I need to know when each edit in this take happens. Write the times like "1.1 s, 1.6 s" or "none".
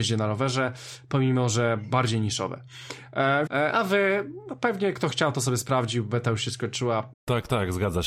3.5 s, 7.1 s